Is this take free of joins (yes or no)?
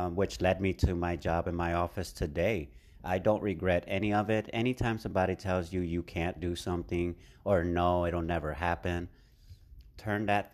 yes